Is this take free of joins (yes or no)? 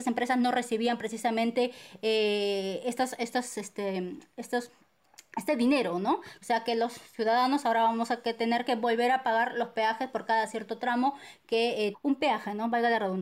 no